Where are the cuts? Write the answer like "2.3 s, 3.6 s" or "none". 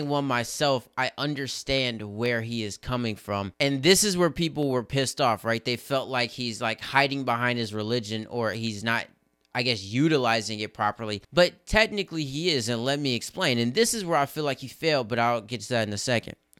none